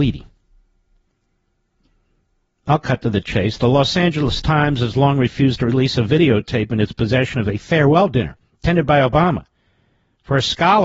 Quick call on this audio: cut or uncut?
uncut